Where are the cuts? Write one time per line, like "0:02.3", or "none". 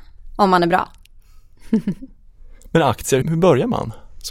0:03.2